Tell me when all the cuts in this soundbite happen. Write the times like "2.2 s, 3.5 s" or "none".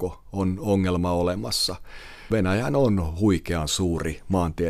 2.3 s

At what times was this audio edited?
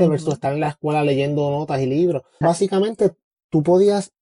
2.4 s

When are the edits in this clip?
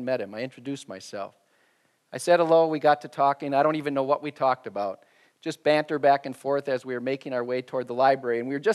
none

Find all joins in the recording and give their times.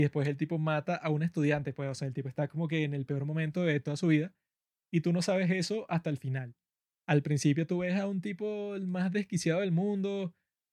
none

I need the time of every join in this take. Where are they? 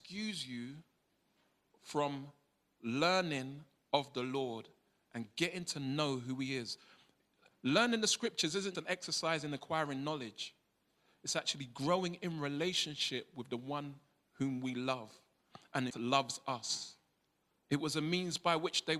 8.7 s, 15.9 s, 17.6 s

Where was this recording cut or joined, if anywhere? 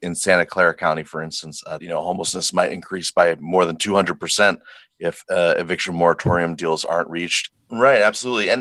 1.8 s, 7.5 s

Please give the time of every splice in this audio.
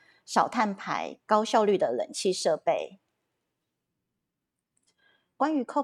none

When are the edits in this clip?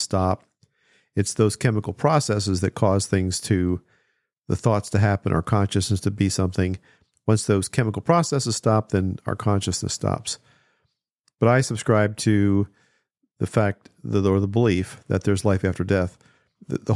9.2 s

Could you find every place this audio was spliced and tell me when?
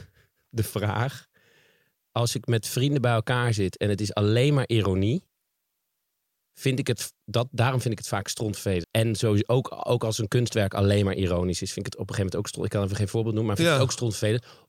8.8 s

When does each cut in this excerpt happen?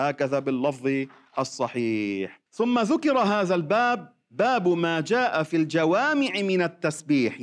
2.5 s

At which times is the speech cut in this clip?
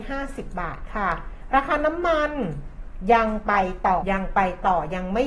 4.0 s

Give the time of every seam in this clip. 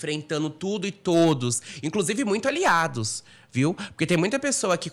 none

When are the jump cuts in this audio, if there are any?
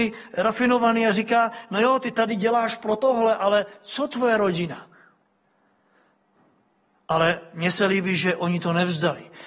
none

